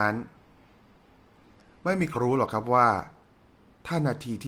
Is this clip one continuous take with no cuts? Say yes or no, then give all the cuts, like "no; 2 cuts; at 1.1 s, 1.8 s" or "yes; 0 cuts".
no; 1 cut; at 2.1 s